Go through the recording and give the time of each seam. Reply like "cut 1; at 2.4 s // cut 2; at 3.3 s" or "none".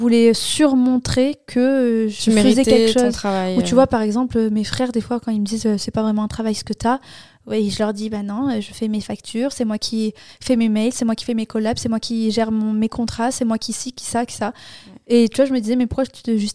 none

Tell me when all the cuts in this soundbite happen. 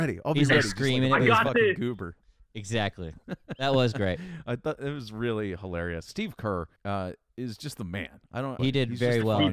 cut 1; at 6.8 s // cut 2; at 8.6 s

